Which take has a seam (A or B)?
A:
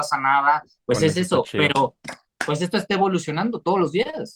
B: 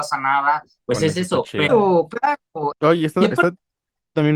B